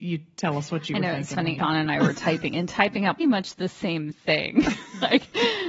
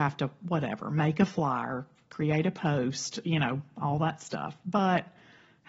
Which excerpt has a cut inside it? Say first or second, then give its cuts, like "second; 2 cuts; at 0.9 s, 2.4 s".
first; 2 cuts; at 1.6 s, 3.2 s